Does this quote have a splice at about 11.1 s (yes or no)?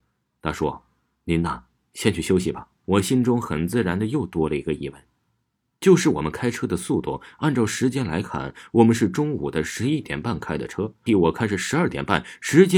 yes